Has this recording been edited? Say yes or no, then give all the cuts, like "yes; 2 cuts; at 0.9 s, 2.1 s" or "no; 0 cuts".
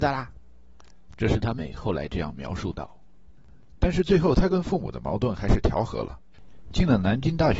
yes; 1 cut; at 1.6 s